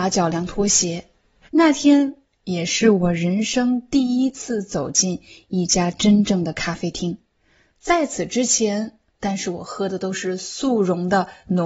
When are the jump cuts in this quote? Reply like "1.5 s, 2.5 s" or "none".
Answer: 1.4 s, 9.1 s